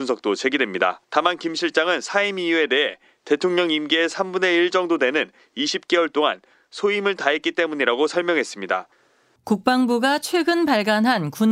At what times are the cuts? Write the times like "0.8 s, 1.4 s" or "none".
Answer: 1.0 s, 9.4 s